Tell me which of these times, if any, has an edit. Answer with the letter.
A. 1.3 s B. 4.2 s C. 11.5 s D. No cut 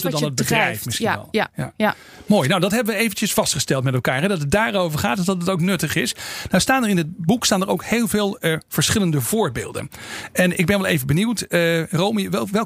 D